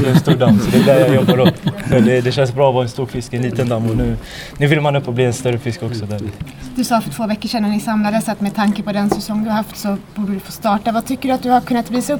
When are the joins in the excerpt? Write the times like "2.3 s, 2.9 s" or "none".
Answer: none